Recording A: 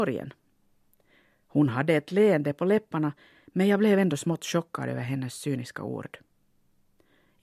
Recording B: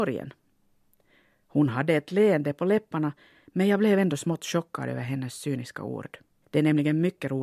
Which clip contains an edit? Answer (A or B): B